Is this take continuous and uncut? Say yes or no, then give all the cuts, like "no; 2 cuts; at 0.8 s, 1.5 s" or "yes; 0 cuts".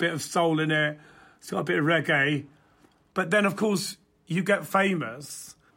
yes; 0 cuts